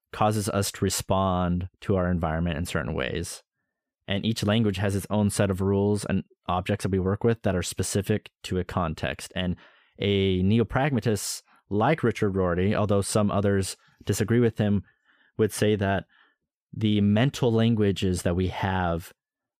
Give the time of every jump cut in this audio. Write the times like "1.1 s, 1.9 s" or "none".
none